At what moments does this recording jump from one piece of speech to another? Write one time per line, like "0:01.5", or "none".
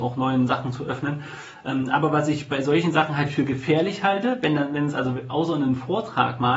none